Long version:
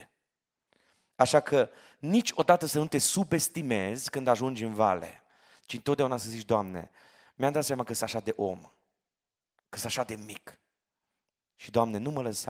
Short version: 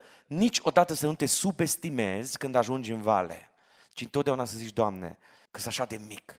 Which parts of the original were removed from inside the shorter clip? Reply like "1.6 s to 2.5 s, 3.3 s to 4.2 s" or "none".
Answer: 7.2 s to 9.6 s